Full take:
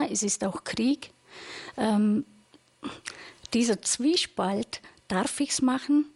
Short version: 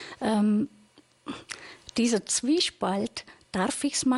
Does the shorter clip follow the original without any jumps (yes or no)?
yes